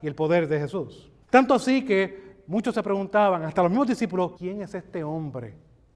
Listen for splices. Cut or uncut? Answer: cut